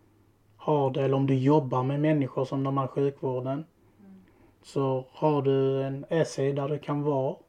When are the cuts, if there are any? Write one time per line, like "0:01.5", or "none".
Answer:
none